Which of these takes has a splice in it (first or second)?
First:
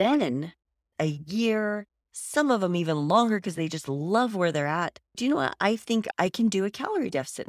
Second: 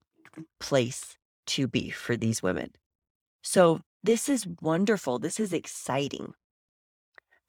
first